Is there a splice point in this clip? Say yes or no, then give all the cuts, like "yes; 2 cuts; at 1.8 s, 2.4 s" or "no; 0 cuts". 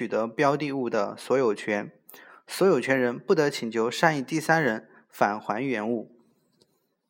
no; 0 cuts